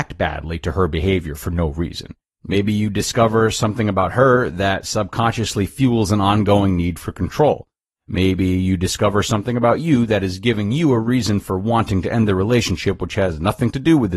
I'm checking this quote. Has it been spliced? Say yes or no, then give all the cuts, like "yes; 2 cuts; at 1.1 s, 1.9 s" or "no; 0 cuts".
yes; 1 cut; at 2.3 s